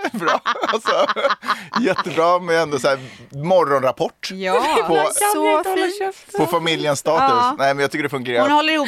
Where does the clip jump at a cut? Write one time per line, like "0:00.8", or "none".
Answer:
none